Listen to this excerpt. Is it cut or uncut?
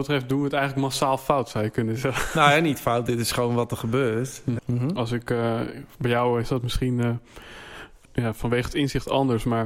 cut